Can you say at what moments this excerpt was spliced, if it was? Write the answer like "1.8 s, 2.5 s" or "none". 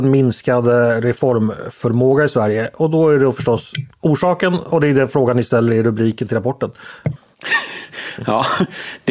7.2 s